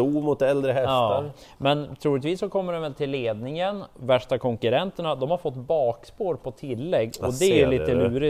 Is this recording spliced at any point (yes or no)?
no